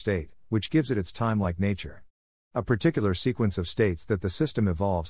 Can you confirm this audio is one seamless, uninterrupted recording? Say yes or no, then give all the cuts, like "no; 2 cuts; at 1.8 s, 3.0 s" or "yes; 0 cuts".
yes; 0 cuts